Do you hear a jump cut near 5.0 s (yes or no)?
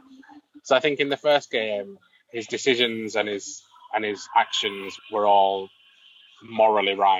yes